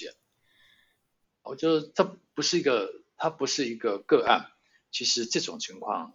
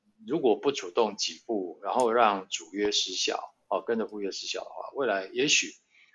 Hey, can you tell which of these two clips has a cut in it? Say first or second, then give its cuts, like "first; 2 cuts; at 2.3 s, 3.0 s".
first; 1 cut; at 1.4 s